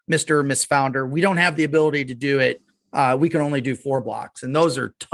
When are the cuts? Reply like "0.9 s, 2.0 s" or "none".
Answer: none